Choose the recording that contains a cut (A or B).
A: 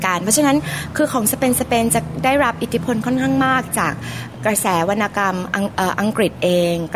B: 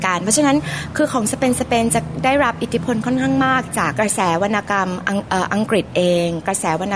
B